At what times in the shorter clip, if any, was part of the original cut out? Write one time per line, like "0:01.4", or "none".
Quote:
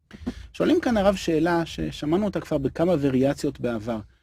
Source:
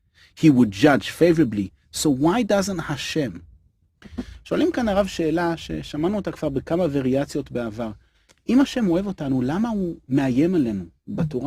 none